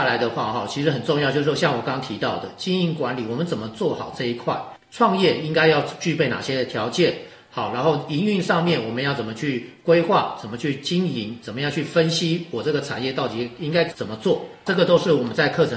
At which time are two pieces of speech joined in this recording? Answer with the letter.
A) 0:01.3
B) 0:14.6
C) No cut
C